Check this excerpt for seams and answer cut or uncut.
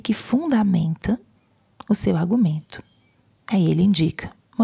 cut